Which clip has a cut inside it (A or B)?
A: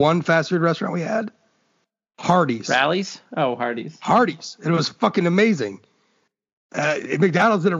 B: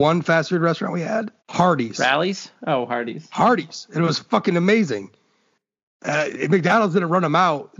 B